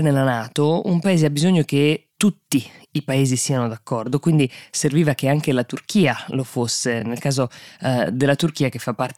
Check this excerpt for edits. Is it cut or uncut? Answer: uncut